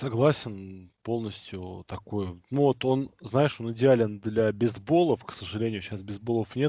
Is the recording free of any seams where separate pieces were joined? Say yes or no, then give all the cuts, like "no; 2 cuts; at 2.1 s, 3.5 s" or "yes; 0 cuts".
yes; 0 cuts